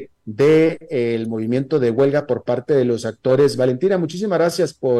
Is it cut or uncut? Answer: uncut